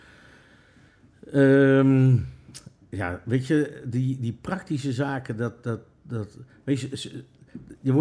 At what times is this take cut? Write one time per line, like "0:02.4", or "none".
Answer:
none